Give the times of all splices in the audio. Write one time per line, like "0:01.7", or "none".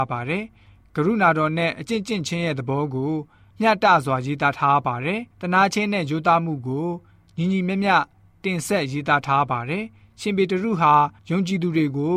0:05.3